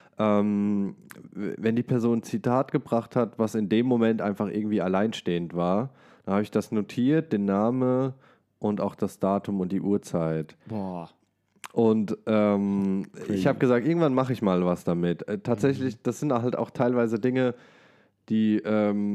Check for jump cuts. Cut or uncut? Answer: uncut